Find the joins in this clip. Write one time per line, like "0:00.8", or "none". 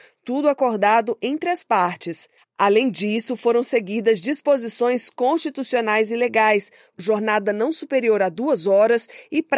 0:02.4
0:06.9